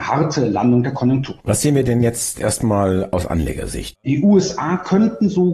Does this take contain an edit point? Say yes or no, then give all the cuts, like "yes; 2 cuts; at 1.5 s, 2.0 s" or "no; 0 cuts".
yes; 2 cuts; at 1.4 s, 3.9 s